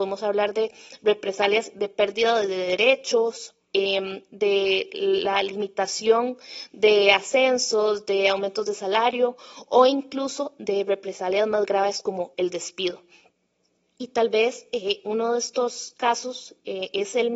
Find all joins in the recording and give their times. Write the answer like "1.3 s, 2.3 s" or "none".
none